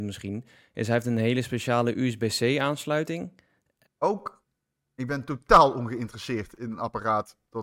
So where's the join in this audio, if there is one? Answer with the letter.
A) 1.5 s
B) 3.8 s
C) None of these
B